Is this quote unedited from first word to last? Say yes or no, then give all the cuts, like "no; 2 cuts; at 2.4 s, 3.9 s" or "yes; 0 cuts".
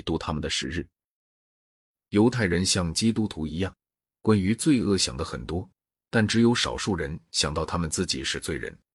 yes; 0 cuts